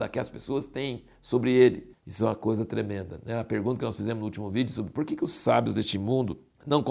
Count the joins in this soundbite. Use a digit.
1